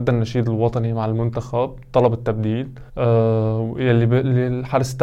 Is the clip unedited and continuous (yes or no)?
no